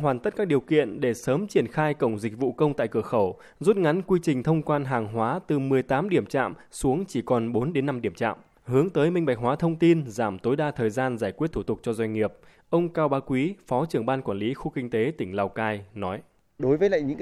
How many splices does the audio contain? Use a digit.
0